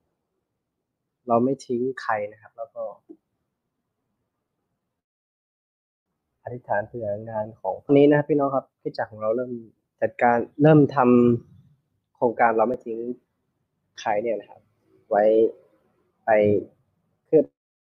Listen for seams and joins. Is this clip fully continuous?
no; 1 cut; at 8.7 s

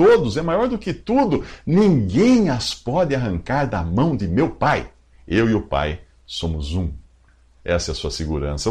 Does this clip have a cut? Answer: no; 0 cuts

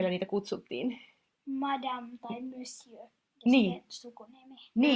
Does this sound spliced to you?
no; 0 cuts

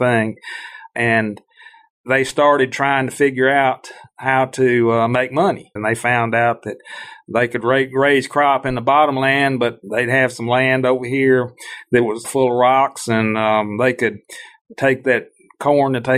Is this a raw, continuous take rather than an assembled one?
no; 2 cuts; at 5.8 s, 12.2 s

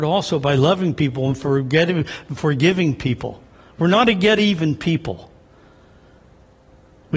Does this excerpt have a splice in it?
no; 0 cuts

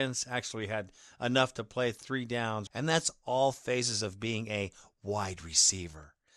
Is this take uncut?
no; 1 cut; at 2.7 s

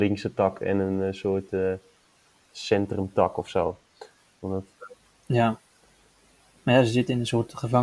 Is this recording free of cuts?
yes; 0 cuts

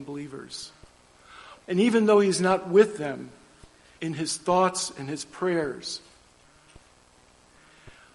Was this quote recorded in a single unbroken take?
no; 2 cuts; at 1.6 s, 4.0 s

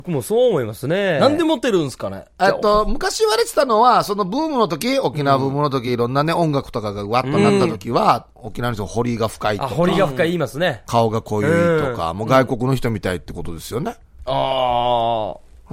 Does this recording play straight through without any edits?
yes; 0 cuts

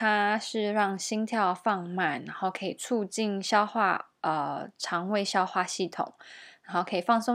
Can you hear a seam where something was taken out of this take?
no; 0 cuts

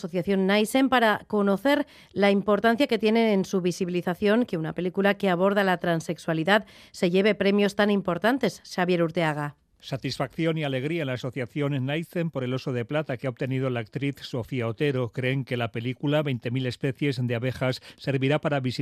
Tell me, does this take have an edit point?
no; 0 cuts

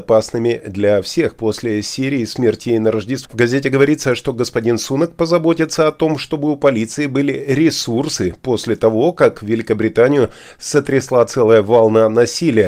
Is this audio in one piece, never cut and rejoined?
no; 1 cut; at 3.3 s

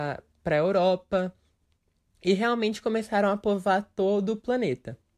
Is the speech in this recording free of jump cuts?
yes; 0 cuts

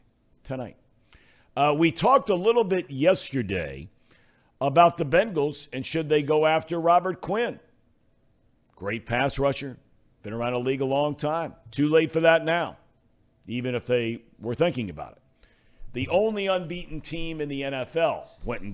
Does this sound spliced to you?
no; 0 cuts

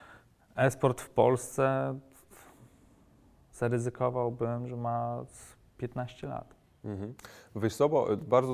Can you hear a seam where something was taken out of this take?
no; 0 cuts

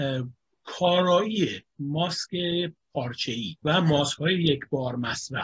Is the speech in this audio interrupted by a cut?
yes; 1 cut; at 3.6 s

